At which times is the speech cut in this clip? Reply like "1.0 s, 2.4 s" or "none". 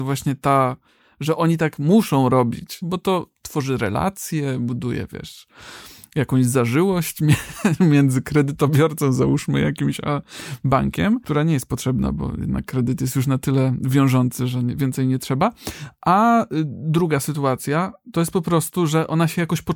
2.8 s